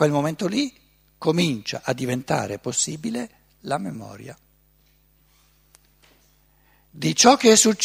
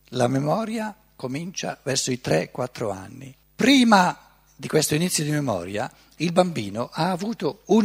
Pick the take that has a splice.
second; 1 cut; at 3.4 s

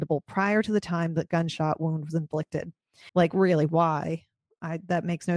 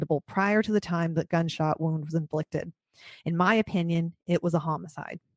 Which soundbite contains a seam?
first; 1 cut; at 3.1 s

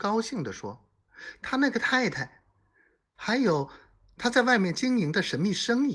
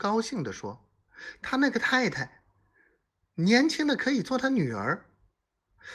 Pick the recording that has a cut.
first; 1 cut; at 3.2 s

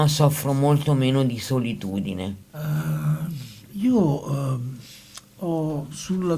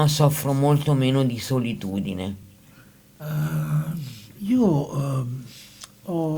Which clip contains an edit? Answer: first; 1 cut; at 2.4 s

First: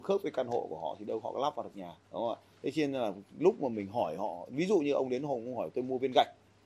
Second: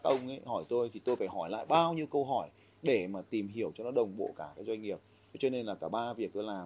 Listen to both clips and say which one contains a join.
first; 1 cut; at 2.0 s

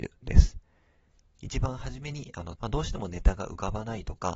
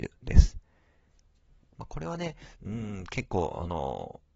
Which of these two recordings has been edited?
first; 2 cuts; at 1.4 s, 2.6 s

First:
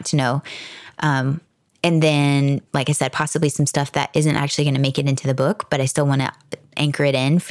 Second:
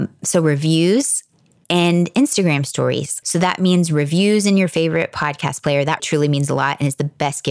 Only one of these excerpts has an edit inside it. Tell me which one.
second; 2 cuts; at 3.2 s, 6.0 s

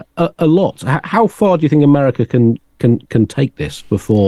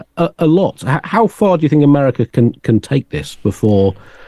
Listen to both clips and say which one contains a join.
second; 1 cut; at 2.3 s

